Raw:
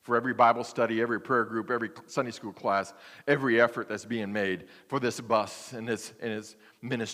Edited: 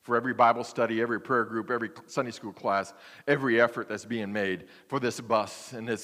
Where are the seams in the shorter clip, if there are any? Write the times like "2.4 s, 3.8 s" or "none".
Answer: none